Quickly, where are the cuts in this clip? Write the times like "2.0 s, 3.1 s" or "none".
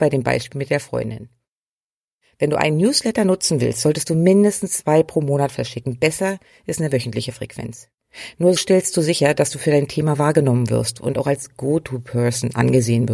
8.6 s